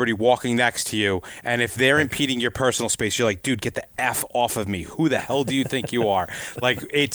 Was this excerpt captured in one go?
yes; 0 cuts

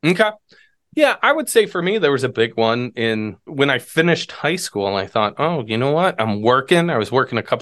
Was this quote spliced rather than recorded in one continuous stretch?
no; 0 cuts

